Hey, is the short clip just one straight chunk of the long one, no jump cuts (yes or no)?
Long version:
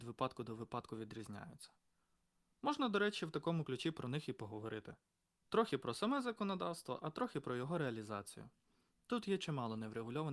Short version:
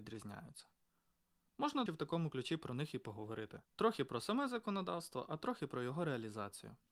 no